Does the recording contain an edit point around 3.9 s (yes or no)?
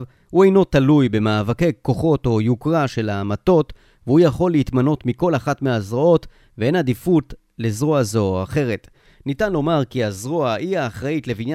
no